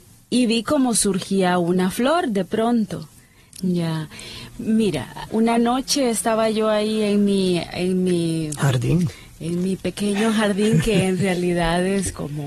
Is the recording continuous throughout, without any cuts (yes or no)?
no